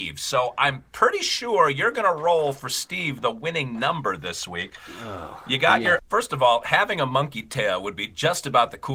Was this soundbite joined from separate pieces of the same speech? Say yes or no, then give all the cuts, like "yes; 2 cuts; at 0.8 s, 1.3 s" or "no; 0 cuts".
yes; 1 cut; at 6.0 s